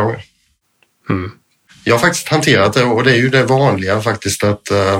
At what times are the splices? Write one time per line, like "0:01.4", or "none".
0:01.7